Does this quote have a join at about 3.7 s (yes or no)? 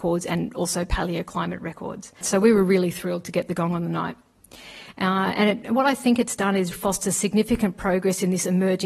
no